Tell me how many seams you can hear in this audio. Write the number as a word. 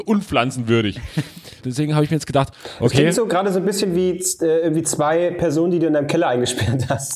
one